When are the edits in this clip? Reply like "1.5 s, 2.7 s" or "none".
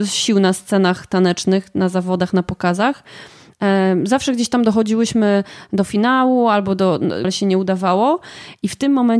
7.2 s